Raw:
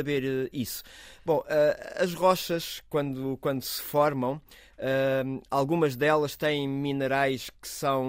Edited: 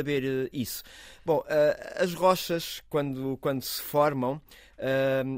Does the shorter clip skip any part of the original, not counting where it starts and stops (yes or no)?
no